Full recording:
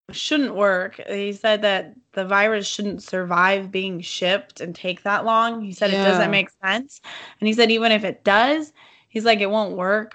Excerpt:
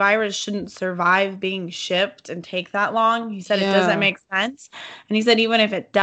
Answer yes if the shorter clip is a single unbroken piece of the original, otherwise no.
yes